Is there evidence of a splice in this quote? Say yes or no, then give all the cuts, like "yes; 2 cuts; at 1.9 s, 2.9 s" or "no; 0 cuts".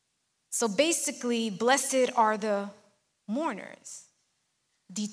no; 0 cuts